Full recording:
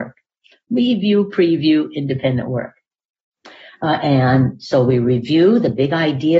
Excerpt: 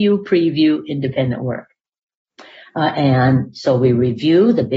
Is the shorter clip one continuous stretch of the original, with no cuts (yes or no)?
yes